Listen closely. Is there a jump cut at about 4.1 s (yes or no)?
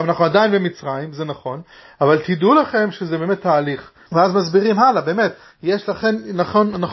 yes